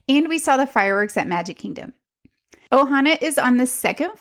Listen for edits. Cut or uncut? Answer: cut